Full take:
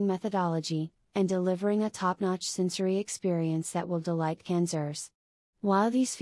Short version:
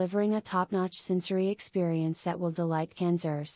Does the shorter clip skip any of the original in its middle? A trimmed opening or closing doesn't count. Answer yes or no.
no